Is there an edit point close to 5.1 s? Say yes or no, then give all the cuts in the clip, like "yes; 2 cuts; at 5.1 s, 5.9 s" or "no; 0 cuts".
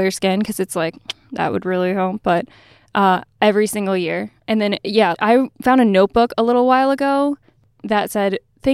yes; 1 cut; at 5.1 s